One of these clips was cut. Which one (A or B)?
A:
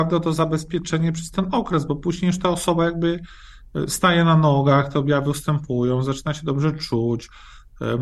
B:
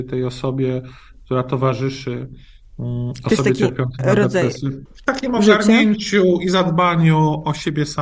B